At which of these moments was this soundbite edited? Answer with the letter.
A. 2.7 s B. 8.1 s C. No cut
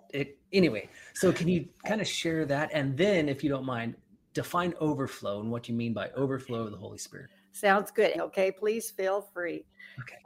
B